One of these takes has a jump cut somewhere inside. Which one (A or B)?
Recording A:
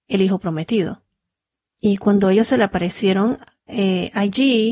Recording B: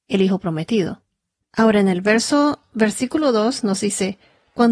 B